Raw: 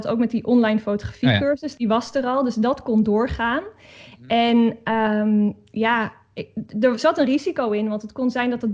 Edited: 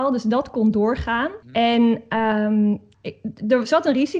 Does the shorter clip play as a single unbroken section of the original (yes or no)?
no